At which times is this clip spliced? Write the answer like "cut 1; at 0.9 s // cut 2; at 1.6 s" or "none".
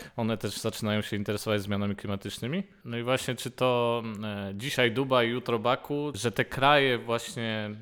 cut 1; at 2.8 s // cut 2; at 6.1 s